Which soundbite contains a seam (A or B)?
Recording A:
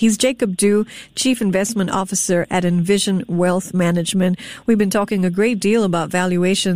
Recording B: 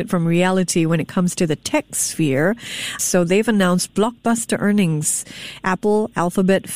B